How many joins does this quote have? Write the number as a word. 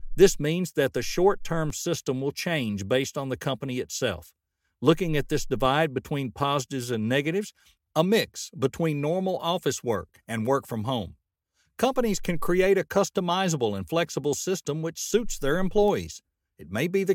one